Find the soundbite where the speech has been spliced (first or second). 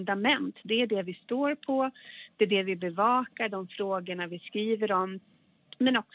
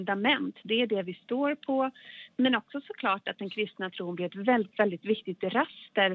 second